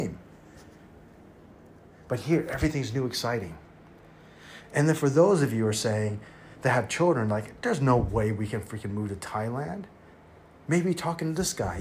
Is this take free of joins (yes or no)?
yes